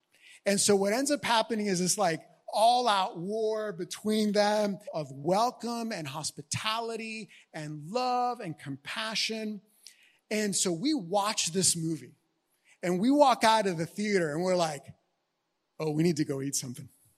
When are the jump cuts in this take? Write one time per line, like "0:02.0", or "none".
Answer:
0:04.9